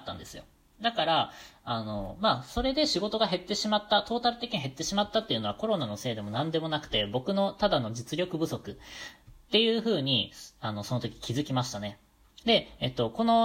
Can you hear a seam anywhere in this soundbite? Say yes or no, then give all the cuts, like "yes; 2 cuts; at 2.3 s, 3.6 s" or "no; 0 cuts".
yes; 1 cut; at 12.4 s